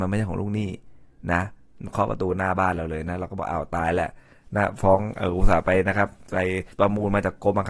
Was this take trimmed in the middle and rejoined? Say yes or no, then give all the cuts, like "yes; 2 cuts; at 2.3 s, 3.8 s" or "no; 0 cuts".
yes; 1 cut; at 6.7 s